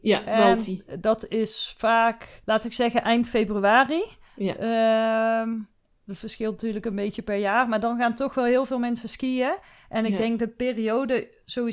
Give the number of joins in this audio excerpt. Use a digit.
1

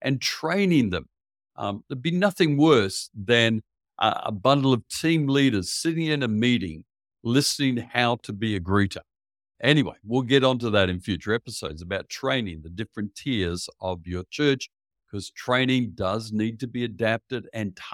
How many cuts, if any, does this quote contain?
1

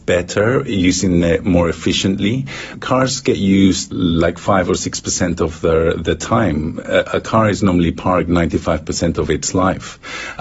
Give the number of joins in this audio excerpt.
0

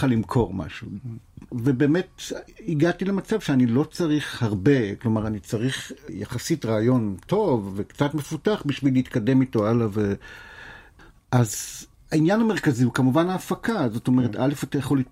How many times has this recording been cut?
1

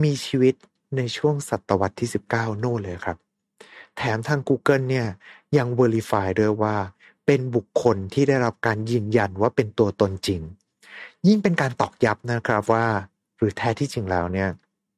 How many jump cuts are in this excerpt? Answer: 0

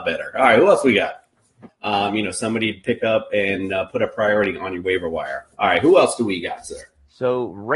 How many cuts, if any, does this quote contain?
1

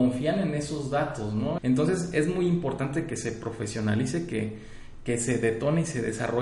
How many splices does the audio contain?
1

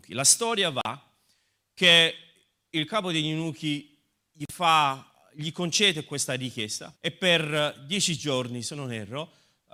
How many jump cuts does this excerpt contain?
1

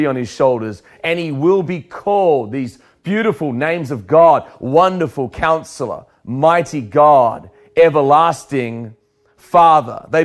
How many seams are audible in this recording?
0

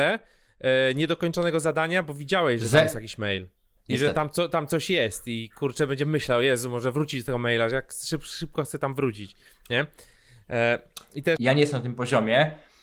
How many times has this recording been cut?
2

